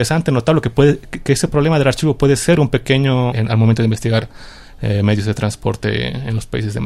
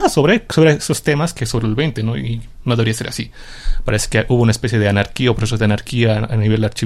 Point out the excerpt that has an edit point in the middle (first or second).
first